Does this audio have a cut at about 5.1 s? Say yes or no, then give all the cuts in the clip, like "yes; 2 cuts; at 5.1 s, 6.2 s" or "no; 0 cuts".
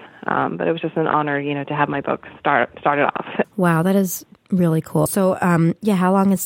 yes; 2 cuts; at 3.4 s, 5.1 s